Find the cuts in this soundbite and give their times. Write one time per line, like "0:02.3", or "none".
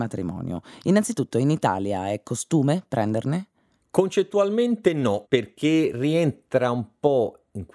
none